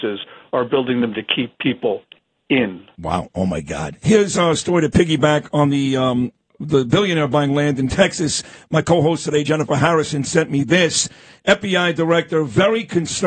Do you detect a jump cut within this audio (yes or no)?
no